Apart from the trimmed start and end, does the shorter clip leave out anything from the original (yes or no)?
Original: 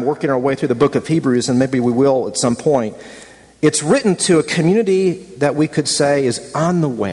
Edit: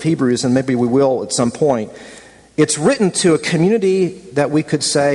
no